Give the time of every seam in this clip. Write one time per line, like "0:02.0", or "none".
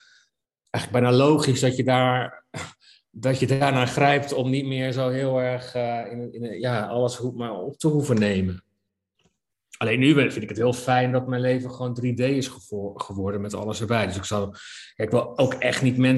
none